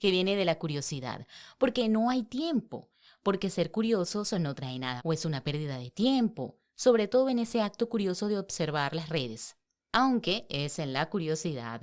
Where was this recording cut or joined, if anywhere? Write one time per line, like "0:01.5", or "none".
0:05.0